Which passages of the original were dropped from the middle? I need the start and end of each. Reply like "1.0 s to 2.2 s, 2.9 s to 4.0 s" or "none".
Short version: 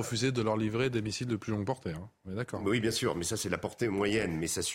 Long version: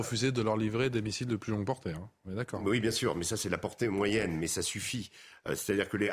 none